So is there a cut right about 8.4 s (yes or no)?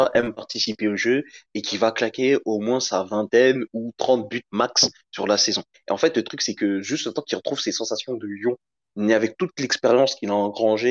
no